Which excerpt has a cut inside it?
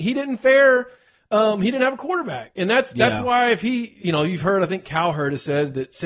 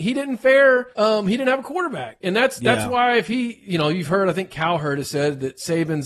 second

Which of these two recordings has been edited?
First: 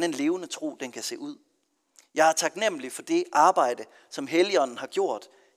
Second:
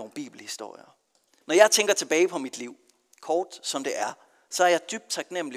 second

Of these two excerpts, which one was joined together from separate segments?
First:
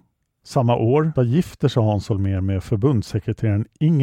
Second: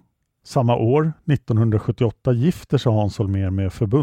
first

